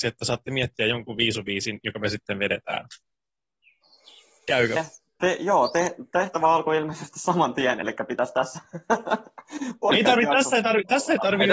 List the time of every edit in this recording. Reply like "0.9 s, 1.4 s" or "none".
none